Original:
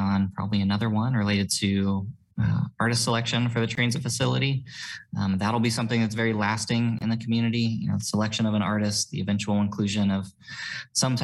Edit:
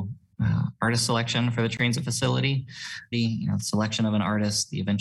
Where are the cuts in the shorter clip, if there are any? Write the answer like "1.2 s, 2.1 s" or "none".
3.1 s